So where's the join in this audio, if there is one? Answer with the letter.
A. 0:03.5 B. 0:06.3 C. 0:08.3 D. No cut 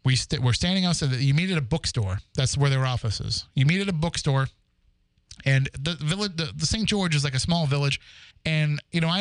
C